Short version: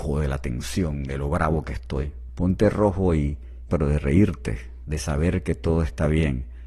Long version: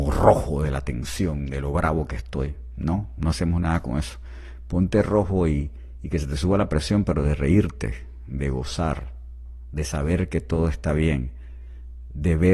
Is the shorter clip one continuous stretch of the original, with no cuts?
no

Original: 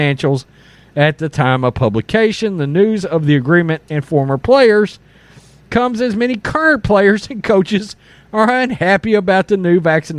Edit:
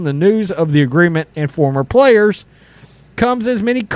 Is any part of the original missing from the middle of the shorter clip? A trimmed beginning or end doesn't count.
no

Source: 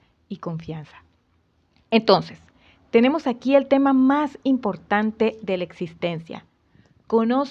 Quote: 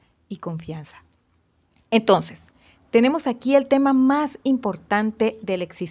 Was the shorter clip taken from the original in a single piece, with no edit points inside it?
yes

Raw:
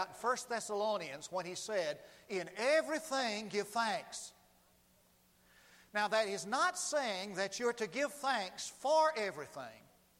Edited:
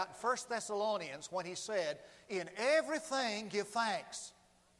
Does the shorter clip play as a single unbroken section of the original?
yes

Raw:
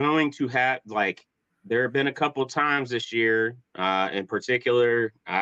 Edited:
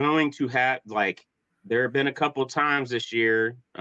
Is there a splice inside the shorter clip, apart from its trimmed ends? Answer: no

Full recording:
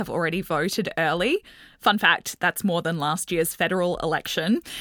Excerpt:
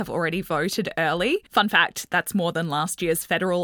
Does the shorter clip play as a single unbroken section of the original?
no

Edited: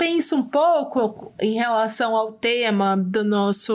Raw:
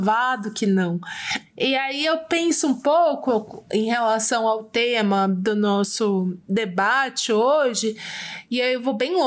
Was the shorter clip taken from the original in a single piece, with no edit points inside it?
yes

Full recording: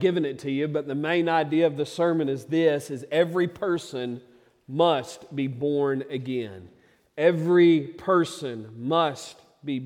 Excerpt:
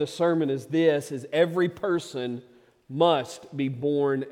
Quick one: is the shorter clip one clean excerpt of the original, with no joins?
yes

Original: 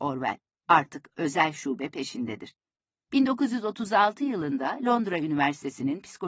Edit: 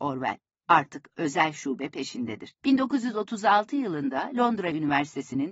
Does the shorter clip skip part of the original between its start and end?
yes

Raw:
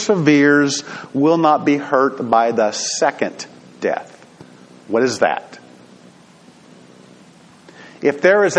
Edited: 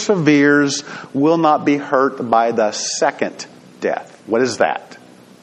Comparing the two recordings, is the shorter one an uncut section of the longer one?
no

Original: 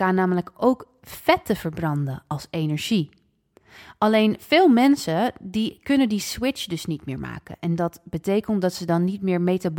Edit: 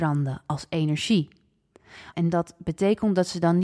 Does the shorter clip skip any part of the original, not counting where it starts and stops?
yes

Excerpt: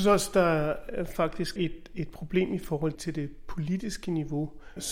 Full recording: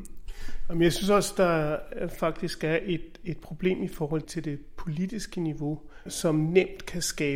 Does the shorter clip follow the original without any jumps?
no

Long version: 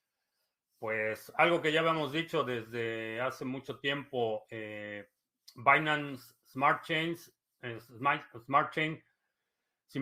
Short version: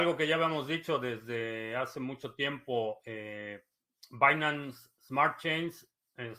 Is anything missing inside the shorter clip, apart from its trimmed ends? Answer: no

